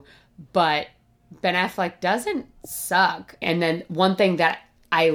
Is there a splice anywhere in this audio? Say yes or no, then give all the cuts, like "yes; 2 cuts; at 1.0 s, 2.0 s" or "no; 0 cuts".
yes; 1 cut; at 3.4 s